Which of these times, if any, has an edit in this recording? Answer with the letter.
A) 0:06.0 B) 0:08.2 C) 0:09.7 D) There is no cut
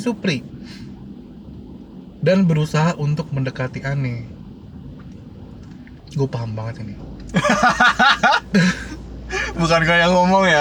A